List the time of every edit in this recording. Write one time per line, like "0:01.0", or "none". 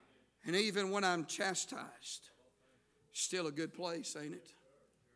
none